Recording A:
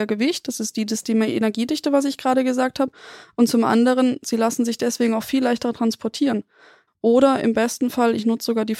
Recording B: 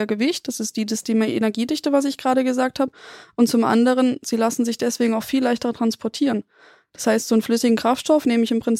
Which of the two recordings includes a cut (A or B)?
A